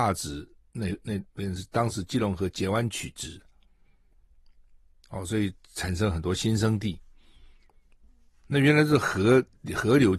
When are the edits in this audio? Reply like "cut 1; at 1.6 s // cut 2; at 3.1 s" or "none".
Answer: none